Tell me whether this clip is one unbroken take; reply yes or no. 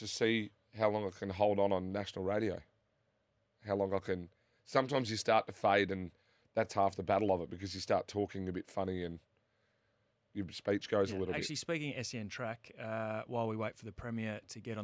yes